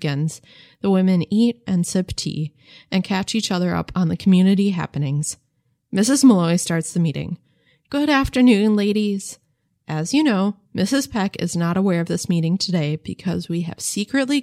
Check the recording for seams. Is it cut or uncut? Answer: uncut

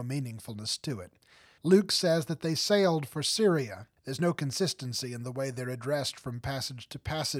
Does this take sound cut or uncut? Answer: cut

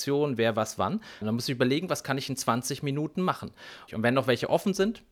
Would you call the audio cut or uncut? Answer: cut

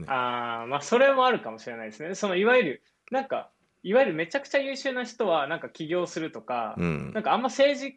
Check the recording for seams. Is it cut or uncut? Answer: uncut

